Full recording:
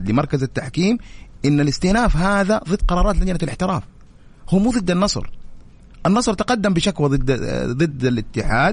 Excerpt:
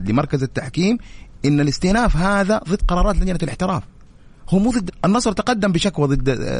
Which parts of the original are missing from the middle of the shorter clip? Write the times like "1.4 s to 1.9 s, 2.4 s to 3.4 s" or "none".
4.9 s to 5.9 s